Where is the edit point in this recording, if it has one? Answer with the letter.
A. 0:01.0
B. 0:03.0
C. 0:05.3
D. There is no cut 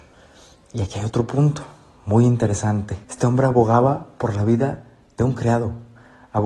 B